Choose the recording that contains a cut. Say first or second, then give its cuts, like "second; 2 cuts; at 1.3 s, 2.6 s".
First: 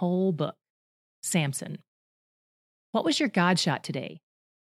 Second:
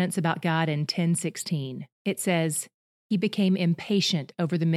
second; 1 cut; at 1.9 s